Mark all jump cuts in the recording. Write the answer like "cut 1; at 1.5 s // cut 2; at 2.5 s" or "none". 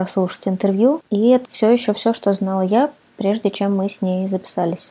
cut 1; at 1.4 s